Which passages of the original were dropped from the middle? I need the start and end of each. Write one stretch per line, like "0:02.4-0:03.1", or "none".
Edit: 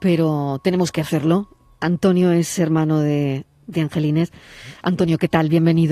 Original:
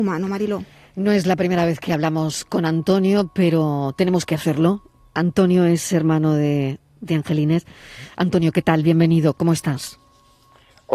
none